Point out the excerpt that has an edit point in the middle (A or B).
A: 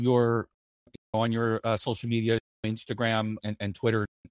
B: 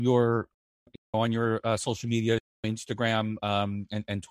A